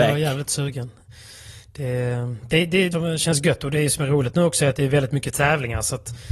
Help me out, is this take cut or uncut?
cut